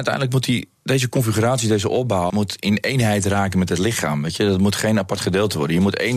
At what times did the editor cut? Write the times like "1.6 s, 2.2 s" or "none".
2.3 s